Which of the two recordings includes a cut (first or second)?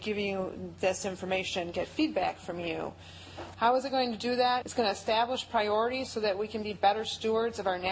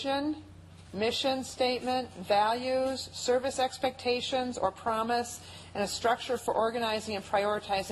first